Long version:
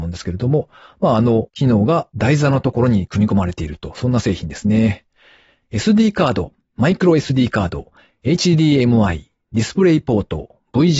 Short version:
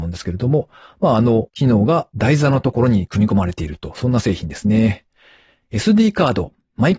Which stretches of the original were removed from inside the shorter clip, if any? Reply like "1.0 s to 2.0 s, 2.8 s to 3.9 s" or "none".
none